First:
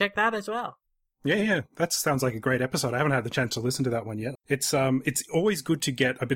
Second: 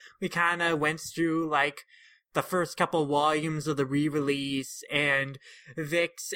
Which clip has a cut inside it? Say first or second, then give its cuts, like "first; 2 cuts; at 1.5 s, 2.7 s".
first; 1 cut; at 4.3 s